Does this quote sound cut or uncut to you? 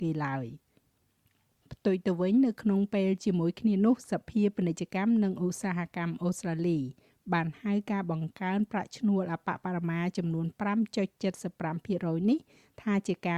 uncut